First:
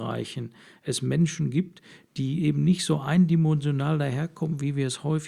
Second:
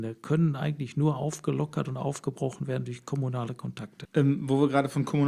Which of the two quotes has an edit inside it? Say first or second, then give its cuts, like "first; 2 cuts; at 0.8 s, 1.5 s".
second; 1 cut; at 4.1 s